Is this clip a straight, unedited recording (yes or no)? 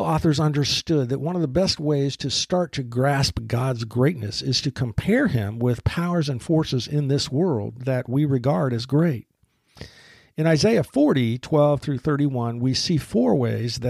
yes